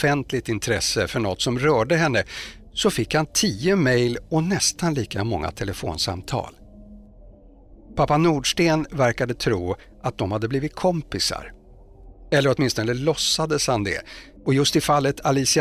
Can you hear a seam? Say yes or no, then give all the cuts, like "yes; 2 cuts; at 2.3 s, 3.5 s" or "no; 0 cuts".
yes; 1 cut; at 14.4 s